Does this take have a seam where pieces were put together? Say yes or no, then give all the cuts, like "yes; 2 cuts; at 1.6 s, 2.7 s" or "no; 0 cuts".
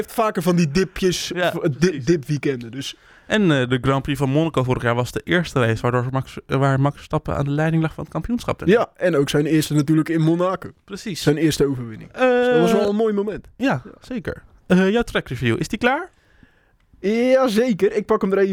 no; 0 cuts